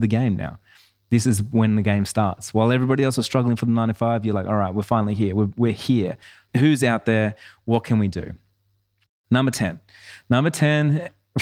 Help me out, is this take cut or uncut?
uncut